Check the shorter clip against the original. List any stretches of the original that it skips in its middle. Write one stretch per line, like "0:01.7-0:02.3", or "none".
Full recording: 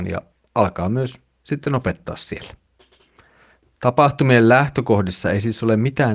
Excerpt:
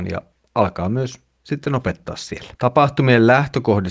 0:02.6-0:03.8